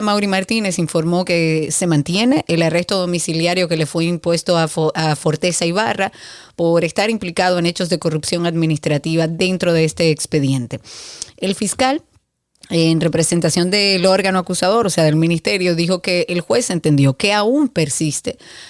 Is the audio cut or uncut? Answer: uncut